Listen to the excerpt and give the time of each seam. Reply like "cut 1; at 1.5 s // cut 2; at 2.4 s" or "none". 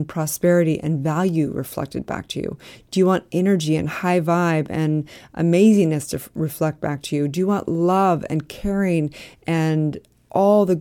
none